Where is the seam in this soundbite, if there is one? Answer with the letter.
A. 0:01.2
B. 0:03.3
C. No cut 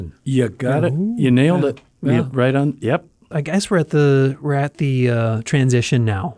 B